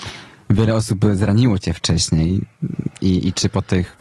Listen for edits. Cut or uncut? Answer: cut